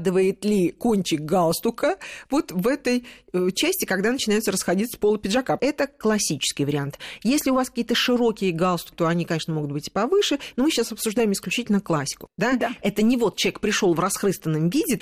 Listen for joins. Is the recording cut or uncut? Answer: cut